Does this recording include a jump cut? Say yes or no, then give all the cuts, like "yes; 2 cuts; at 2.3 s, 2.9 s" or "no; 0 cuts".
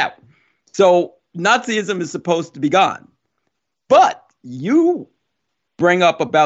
no; 0 cuts